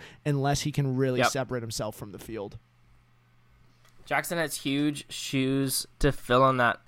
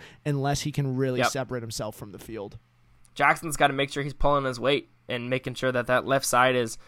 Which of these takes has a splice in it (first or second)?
second